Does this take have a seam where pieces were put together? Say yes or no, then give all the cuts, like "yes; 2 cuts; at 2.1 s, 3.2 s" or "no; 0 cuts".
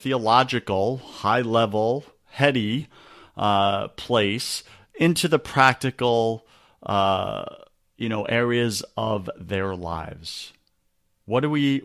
no; 0 cuts